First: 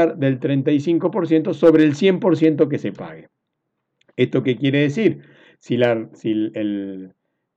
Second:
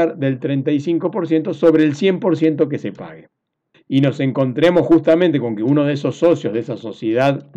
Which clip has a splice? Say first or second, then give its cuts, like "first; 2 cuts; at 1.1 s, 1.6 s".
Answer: second; 1 cut; at 3.7 s